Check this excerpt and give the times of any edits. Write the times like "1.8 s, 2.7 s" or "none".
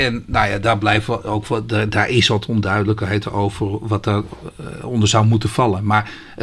none